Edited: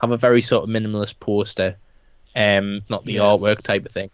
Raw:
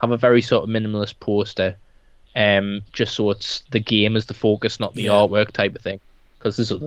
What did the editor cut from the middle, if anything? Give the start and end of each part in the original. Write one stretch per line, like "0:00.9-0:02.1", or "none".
0:02.9-0:04.8